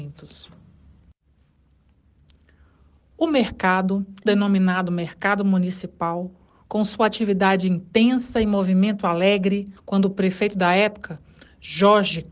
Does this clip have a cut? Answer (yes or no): yes